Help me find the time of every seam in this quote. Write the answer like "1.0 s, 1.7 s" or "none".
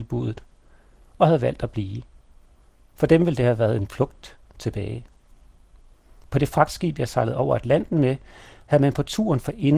none